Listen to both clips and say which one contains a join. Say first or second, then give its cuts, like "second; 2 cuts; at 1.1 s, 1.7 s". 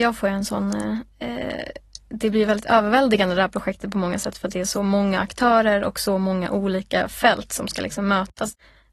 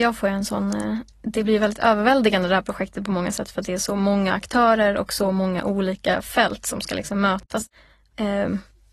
second; 1 cut; at 1.1 s